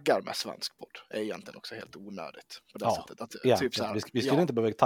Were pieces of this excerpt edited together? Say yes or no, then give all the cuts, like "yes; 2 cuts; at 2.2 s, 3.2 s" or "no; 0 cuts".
no; 0 cuts